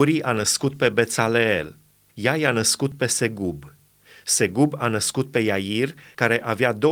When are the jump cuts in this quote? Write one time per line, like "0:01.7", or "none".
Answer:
0:02.1